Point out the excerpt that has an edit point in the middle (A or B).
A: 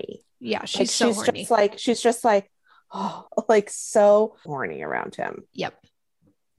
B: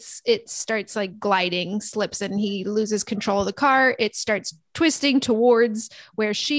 A